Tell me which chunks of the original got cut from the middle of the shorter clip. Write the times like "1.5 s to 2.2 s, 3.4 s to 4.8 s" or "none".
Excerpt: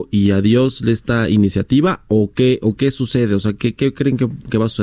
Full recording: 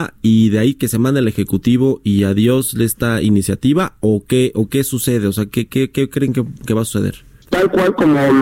5.7 s to 5.9 s